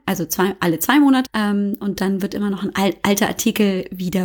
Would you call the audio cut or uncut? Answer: cut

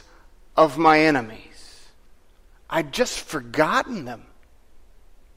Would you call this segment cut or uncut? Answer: uncut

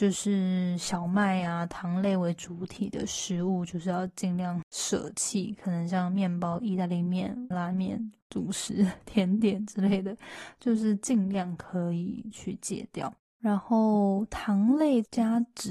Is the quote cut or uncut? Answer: cut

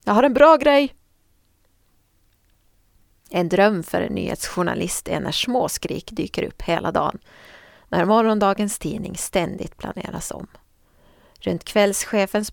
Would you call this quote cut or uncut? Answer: uncut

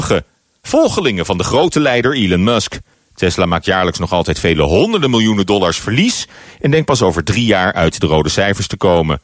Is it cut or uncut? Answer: cut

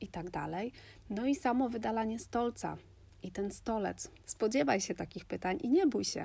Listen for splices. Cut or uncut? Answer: cut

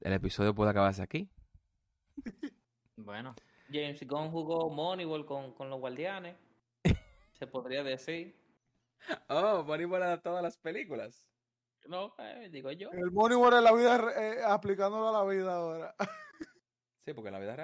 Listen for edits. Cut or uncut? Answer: uncut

